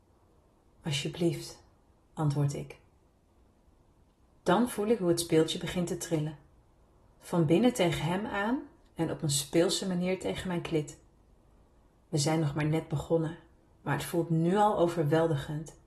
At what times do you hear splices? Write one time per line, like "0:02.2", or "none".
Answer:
0:08.9